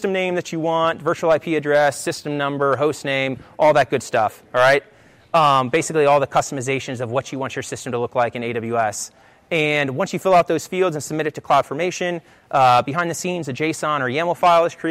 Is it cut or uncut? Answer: uncut